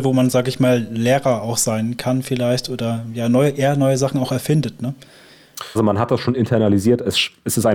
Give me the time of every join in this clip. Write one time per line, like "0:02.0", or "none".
0:05.8